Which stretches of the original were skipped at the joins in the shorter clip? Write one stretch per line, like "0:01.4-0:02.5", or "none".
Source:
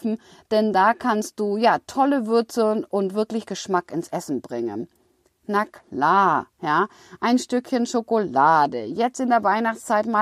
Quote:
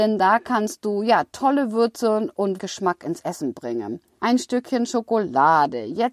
0:03.1-0:03.4
0:05.0-0:07.2